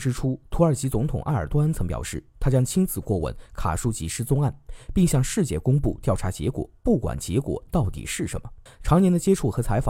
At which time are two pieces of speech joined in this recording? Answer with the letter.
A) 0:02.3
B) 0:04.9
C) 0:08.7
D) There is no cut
C